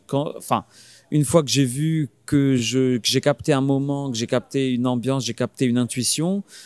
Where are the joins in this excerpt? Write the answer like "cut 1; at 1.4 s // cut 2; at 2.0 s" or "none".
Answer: none